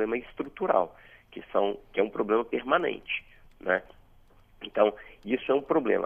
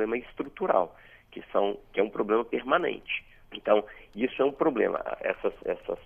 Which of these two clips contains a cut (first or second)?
second